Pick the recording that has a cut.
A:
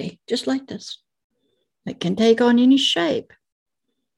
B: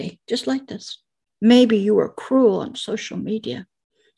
B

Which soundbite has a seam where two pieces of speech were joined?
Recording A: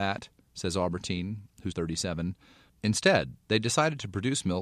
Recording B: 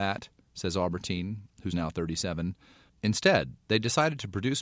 A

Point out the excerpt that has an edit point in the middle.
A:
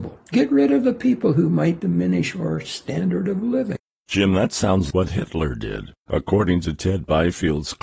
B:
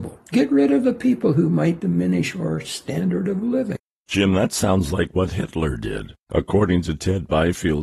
A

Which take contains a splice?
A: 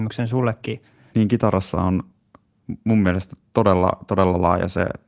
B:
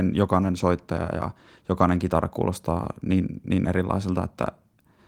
A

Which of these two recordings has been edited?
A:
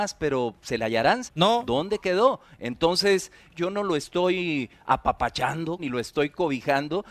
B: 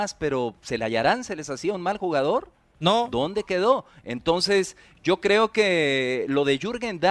A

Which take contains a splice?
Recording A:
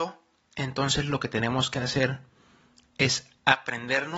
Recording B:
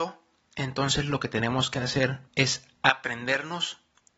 B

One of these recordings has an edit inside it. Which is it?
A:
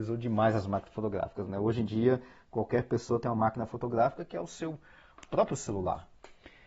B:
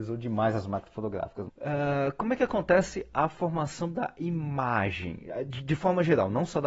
B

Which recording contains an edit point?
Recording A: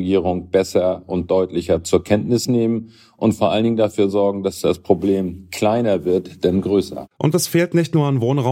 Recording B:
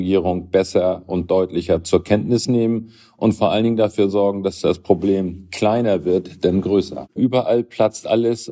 B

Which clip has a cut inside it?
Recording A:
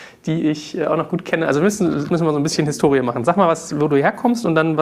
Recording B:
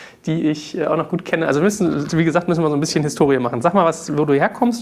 A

